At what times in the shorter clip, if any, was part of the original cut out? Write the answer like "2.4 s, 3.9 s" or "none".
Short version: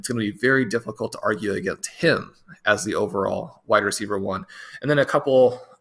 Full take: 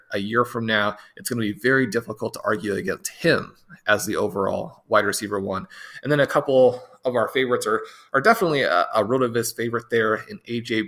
none